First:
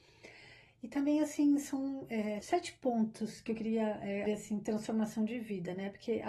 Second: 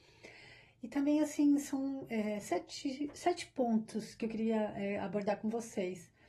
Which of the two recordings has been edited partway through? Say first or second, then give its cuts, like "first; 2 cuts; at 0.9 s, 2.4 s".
first; 2 cuts; at 2.4 s, 4.3 s